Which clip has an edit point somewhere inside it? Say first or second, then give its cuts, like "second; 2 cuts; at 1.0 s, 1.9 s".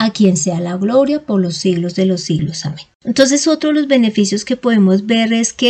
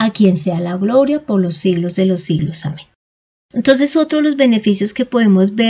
first; 1 cut; at 2.9 s